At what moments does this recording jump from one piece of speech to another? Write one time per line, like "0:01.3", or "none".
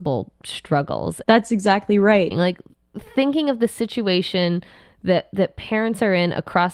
0:01.2
0:02.3